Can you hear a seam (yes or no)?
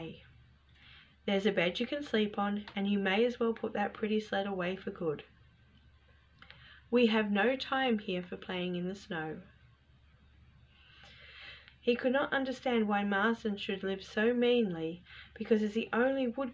yes